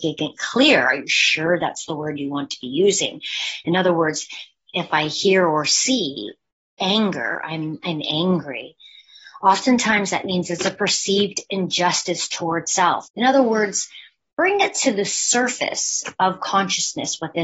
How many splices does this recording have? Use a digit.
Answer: 1